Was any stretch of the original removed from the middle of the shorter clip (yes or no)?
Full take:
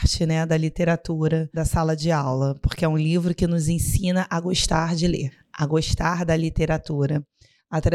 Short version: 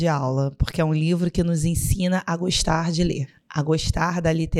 no